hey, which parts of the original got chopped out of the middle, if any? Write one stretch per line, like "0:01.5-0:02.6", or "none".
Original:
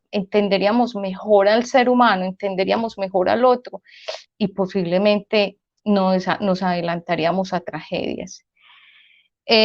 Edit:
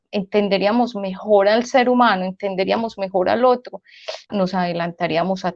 0:04.3-0:06.4